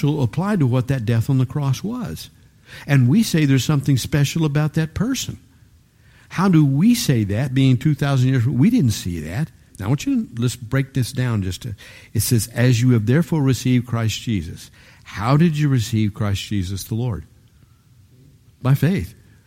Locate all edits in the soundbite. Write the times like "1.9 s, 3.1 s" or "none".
9.7 s

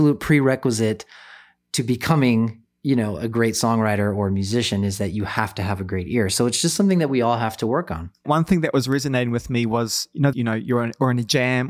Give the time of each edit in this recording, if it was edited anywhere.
8.2 s, 10.3 s

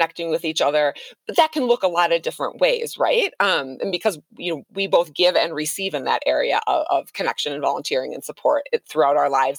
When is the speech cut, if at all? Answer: none

